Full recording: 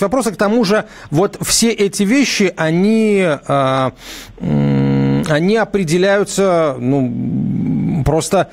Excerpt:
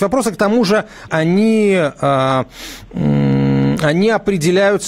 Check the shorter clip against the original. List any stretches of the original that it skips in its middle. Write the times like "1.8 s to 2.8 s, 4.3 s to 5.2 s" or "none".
1.1 s to 2.5 s